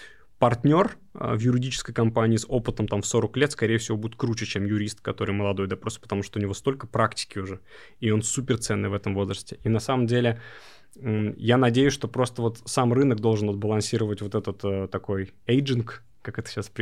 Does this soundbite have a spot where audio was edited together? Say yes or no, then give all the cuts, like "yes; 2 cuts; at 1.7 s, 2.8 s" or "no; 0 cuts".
no; 0 cuts